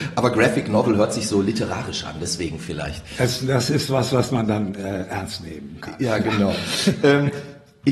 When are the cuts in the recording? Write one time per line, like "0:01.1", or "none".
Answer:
none